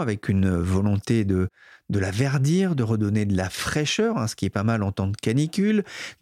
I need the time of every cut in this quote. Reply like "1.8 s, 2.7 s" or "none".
none